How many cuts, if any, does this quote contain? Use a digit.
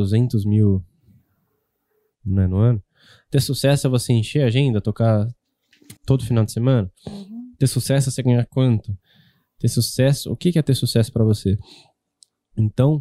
1